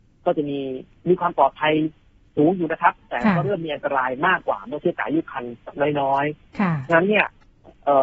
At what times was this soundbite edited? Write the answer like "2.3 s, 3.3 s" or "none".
none